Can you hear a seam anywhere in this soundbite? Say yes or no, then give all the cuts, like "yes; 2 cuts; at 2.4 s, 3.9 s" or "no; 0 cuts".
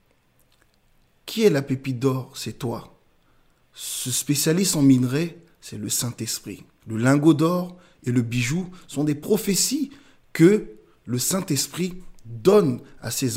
yes; 1 cut; at 6.8 s